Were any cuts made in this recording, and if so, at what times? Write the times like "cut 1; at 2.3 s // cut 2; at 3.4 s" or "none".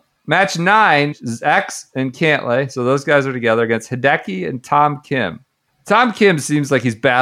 cut 1; at 1.1 s // cut 2; at 5.7 s